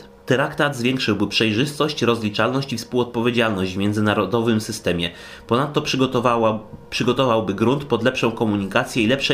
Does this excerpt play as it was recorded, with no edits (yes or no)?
yes